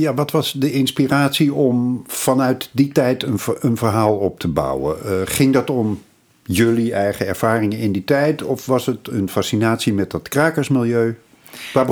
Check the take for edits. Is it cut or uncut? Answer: uncut